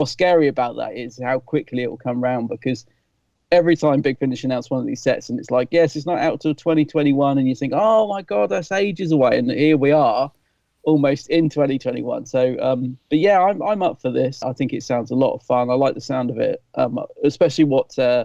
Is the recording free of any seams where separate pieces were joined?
no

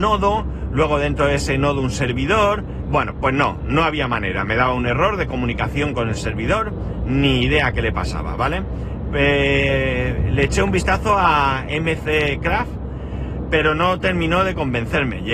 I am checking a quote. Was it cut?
no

